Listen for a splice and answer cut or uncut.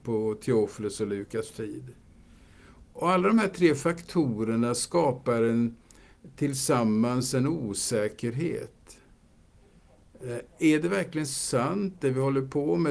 uncut